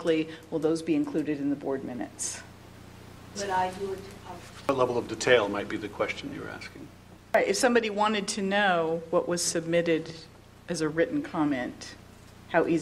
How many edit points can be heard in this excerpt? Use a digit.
1